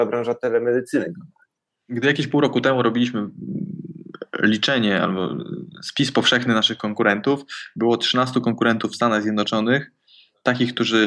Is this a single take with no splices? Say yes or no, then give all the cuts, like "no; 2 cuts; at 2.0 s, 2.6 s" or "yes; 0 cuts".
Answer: yes; 0 cuts